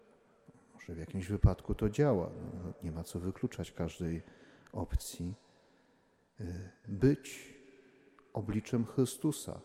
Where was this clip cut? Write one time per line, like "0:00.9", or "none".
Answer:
0:06.8